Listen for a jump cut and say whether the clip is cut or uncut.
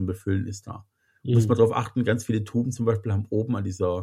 uncut